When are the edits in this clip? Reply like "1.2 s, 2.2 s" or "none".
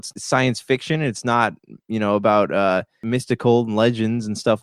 none